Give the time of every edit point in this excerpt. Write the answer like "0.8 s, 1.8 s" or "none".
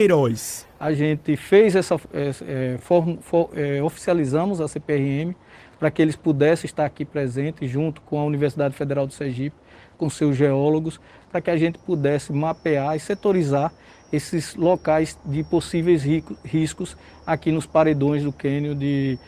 none